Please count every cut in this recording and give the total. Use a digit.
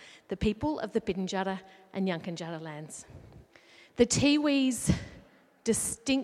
1